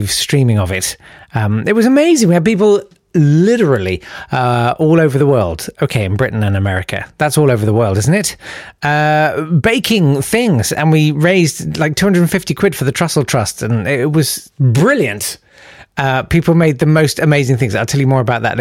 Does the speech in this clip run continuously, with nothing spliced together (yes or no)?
yes